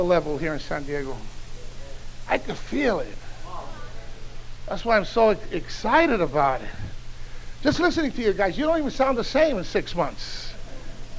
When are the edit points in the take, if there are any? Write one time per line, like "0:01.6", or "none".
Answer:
none